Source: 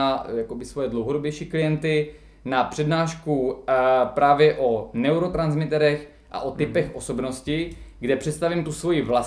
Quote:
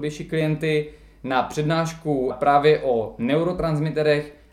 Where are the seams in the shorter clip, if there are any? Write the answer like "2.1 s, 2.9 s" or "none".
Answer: 2.3 s